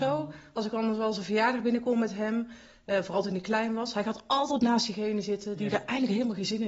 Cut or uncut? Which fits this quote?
uncut